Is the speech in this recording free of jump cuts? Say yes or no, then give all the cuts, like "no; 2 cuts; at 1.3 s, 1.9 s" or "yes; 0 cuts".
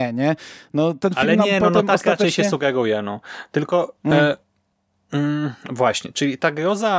yes; 0 cuts